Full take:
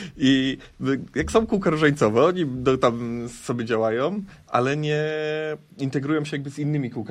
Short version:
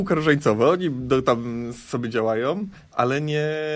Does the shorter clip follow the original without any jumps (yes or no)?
yes